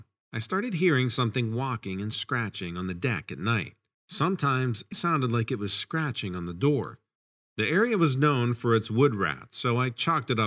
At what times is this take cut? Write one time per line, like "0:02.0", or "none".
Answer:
0:04.9